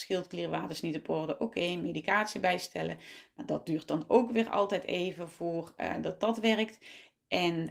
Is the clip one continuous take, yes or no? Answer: yes